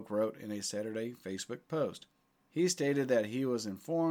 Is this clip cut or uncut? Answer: cut